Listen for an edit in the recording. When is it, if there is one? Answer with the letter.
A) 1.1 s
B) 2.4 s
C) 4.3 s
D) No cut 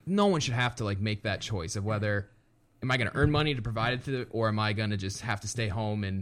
C